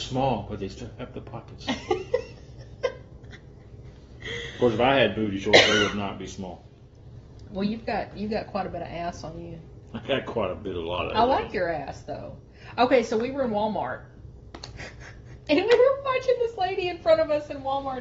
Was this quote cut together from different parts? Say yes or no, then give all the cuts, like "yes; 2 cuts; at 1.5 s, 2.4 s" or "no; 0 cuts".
no; 0 cuts